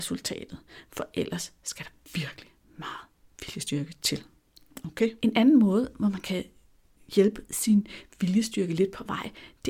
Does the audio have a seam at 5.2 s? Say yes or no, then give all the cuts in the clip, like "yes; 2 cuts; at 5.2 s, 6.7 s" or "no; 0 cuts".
yes; 1 cut; at 5.2 s